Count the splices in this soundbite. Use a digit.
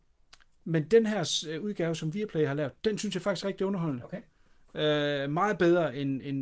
0